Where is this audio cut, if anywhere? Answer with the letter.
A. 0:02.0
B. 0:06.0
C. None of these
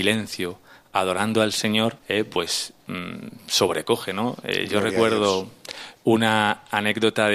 A